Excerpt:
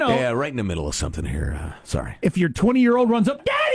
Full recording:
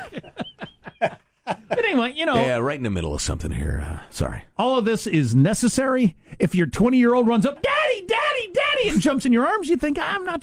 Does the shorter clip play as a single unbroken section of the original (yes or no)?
no